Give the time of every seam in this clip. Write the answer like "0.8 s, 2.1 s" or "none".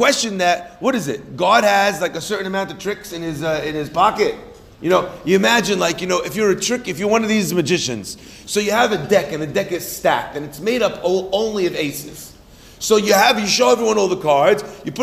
none